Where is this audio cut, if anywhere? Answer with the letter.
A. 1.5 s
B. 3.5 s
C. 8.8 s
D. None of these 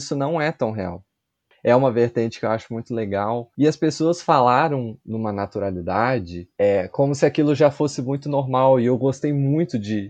A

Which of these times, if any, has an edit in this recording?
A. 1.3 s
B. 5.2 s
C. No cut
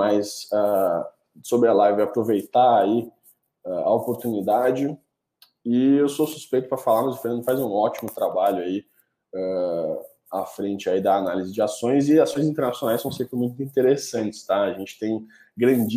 C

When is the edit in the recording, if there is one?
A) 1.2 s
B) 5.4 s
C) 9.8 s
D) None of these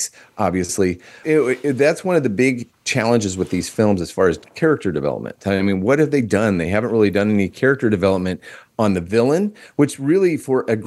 A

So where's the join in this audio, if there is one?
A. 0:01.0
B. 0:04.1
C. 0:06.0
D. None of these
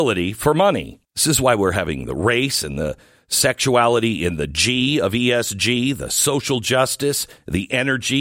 A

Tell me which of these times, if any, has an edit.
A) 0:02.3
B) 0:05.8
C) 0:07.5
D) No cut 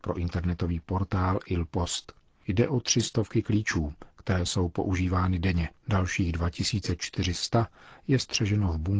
B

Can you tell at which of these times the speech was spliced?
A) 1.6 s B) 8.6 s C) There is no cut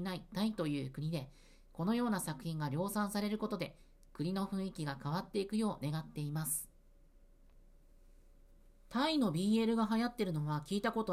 C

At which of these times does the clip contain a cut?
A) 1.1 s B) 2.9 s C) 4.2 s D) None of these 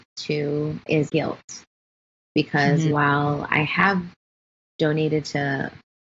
A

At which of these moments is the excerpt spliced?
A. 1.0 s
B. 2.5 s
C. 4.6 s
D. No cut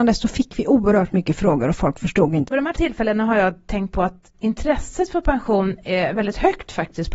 B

